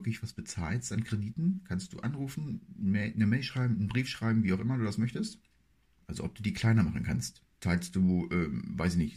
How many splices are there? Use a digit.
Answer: 2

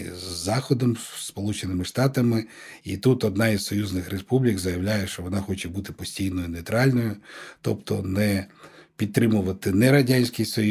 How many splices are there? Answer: 0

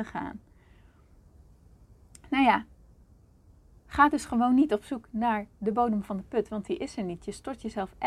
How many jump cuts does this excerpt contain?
0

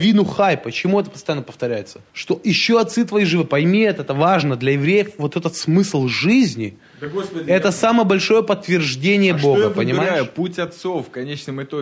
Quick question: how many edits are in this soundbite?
1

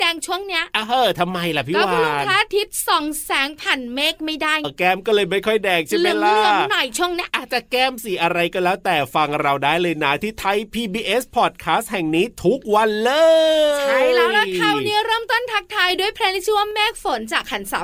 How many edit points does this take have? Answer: 1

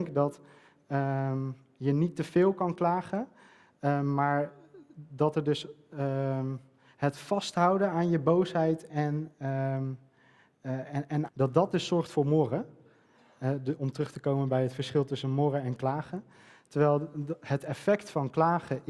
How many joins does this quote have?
2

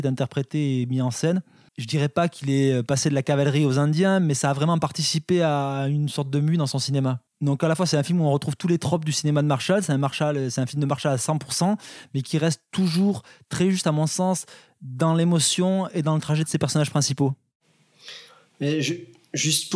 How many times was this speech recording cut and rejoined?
2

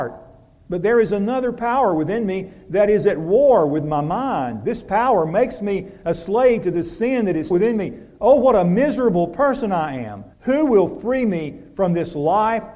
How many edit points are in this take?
2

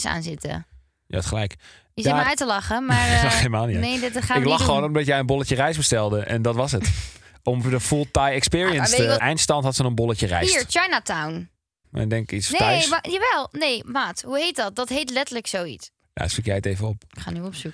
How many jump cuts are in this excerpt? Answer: 3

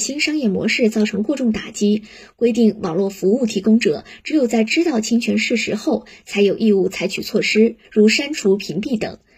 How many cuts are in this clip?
1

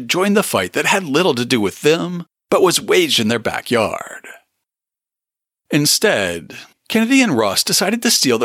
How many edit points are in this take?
1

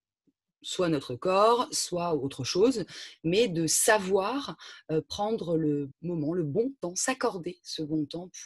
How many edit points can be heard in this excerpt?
1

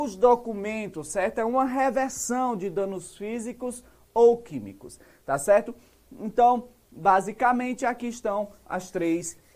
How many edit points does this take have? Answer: 0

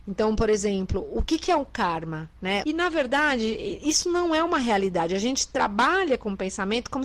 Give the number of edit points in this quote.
1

